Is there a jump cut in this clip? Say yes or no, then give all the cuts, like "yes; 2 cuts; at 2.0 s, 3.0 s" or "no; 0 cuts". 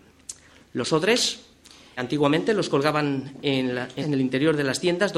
yes; 2 cuts; at 2.0 s, 4.0 s